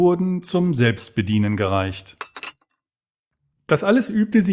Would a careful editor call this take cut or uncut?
uncut